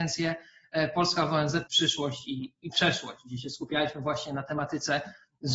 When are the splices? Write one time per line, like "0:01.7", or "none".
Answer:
0:01.7